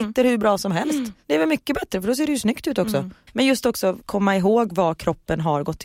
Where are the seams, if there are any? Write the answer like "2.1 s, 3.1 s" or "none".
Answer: 3.3 s